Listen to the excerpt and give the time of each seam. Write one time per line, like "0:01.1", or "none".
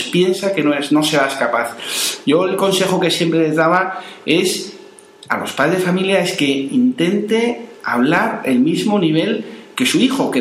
none